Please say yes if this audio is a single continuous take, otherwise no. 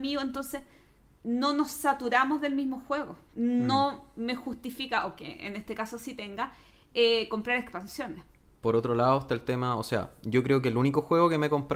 no